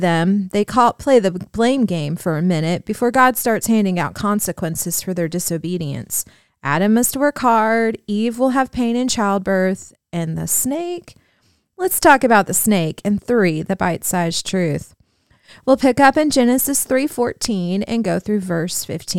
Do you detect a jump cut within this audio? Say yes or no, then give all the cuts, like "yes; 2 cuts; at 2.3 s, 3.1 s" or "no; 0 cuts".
no; 0 cuts